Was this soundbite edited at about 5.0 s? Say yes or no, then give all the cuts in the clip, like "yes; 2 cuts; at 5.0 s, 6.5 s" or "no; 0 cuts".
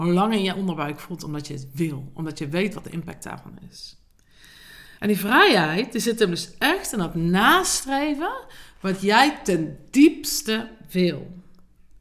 yes; 1 cut; at 5.0 s